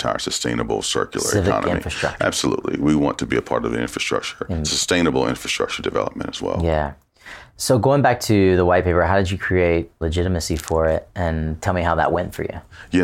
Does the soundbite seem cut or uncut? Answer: uncut